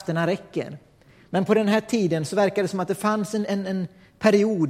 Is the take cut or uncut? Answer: uncut